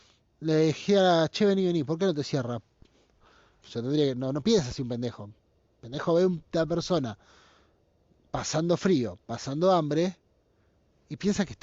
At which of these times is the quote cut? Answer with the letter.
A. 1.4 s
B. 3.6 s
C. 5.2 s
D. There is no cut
B